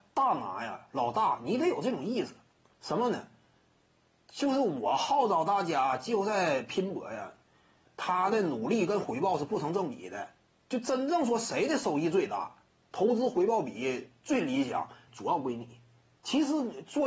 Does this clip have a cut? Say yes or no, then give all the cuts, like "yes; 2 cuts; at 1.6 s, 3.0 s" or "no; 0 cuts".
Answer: yes; 2 cuts; at 7.9 s, 15.1 s